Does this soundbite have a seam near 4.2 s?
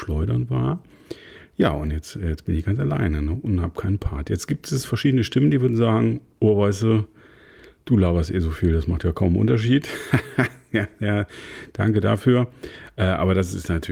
no; 0 cuts

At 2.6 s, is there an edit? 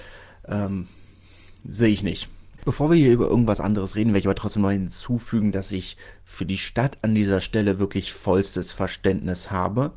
yes; 1 cut; at 2.6 s

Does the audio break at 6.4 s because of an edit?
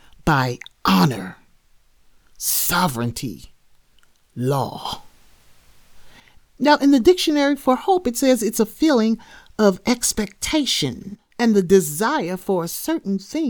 yes; 1 cut; at 6.4 s

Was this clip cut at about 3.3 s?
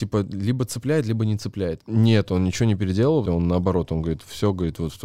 yes; 2 cuts; at 1.8 s, 3.3 s

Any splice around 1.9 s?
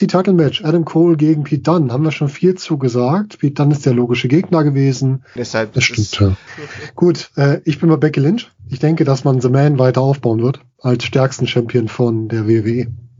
no; 2 cuts; at 5.4 s, 6.5 s

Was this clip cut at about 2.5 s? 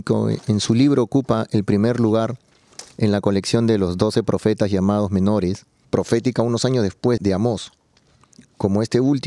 no; 2 cuts; at 5.8 s, 7.2 s

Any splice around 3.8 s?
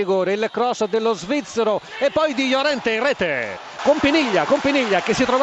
yes; 1 cut; at 3.8 s

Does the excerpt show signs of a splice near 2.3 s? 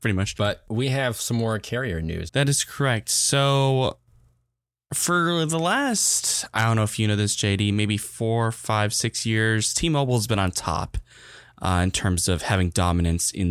yes; 1 cut; at 2.3 s

